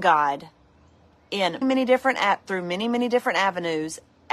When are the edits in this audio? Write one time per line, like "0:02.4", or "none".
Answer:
0:01.6